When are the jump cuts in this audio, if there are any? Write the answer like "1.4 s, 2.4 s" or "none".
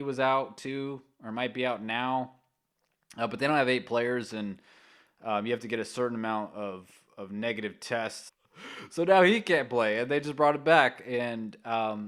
8.3 s